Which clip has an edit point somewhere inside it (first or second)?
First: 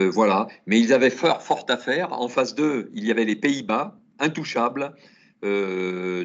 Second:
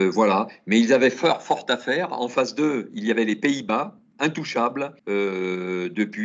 second